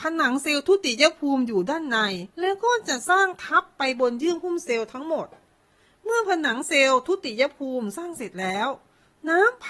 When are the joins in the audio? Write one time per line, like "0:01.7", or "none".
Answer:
0:02.3

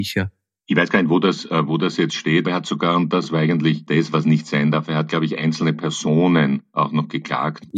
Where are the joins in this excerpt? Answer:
0:02.4

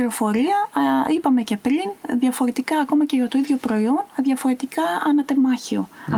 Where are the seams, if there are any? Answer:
none

